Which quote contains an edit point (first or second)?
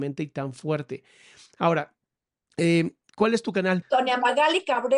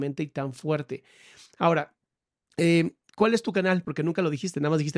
first